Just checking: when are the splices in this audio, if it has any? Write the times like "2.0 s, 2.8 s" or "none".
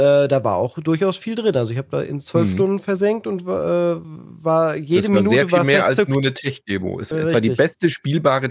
7.1 s